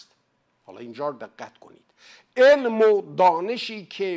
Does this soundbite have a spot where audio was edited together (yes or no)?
no